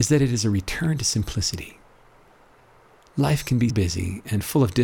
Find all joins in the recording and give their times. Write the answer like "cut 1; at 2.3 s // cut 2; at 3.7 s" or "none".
cut 1; at 3.7 s